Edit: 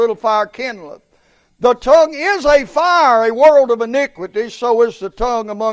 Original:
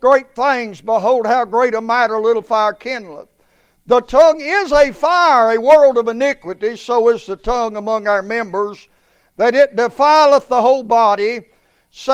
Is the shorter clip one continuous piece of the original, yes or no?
yes